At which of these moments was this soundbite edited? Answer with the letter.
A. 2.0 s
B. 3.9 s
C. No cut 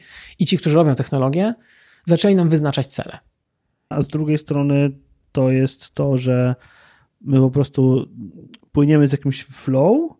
B